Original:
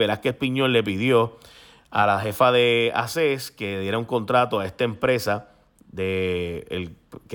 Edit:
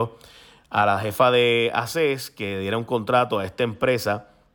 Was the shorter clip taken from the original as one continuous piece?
yes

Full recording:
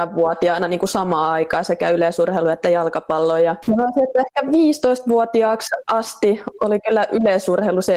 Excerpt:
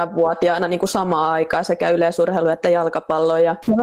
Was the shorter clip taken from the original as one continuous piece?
yes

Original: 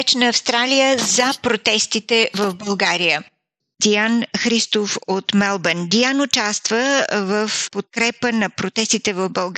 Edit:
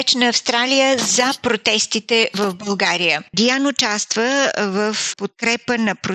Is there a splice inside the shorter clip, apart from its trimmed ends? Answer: yes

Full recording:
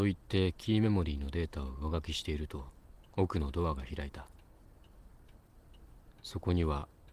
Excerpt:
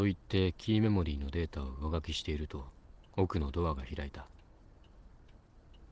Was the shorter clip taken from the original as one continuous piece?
yes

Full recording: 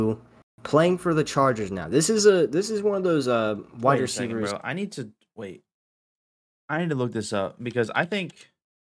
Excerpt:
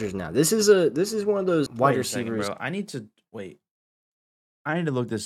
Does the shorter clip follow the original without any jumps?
no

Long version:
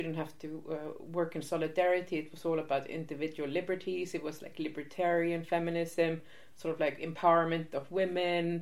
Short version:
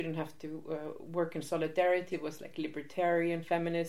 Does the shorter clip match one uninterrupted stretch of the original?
no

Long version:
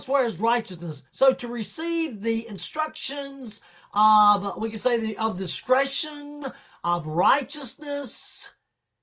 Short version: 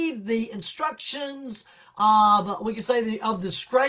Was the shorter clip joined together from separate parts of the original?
no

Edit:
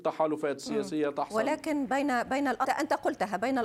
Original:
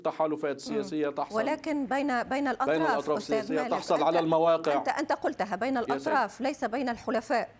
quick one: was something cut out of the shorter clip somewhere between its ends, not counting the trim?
yes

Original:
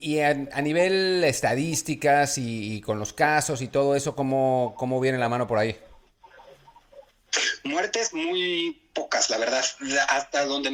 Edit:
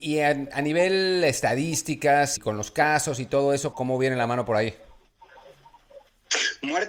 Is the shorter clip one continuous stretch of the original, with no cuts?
no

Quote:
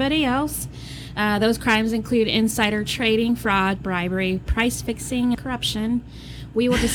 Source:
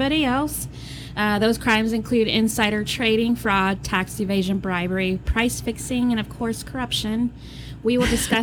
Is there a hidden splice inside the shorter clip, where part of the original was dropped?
yes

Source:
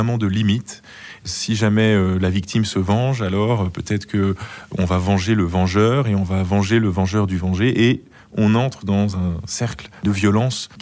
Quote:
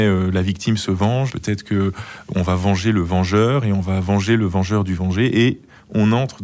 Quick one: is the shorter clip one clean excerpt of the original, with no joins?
no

